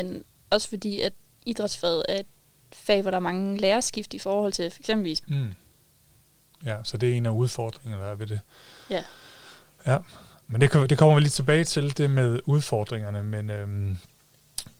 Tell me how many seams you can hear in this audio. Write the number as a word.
one